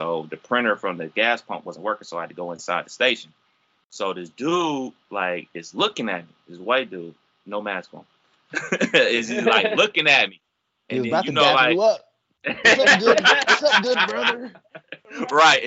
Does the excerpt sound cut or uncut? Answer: uncut